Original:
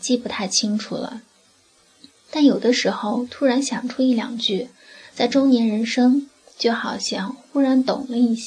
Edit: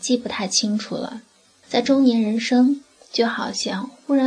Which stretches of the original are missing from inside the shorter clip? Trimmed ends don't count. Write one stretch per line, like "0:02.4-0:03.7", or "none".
0:01.6-0:05.1